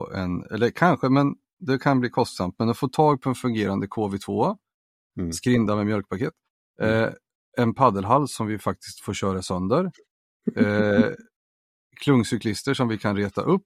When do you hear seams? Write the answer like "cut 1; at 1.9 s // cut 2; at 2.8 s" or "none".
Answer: none